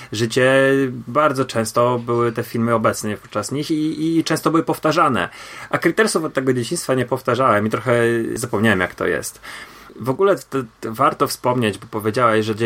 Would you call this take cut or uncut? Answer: uncut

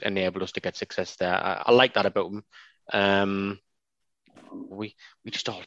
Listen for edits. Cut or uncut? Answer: cut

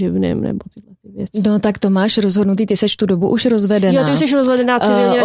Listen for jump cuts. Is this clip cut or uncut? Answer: uncut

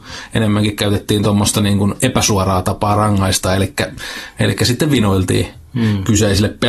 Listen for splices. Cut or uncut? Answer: uncut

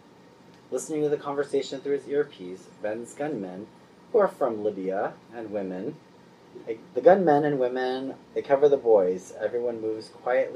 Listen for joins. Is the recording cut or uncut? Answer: cut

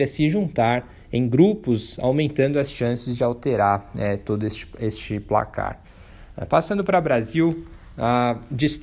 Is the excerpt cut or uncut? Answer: uncut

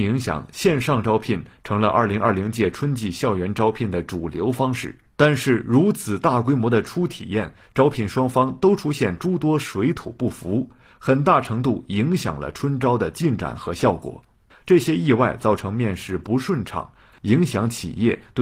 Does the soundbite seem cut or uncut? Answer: cut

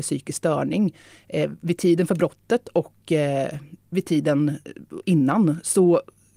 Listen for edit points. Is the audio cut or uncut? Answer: uncut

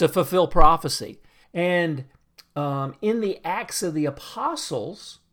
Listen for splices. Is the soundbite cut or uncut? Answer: cut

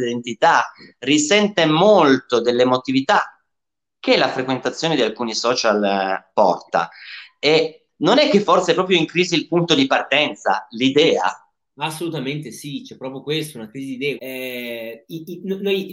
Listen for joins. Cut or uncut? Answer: cut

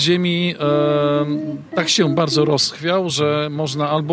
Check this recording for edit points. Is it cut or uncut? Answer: uncut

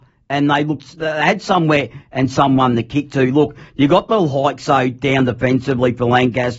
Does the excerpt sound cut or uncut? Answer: uncut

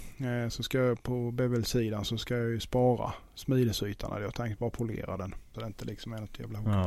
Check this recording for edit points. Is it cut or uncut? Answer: cut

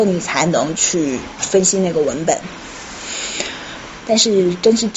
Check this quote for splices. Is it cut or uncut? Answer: cut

